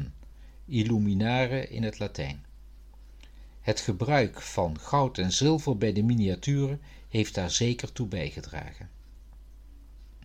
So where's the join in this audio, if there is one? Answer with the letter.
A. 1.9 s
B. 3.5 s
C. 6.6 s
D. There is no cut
D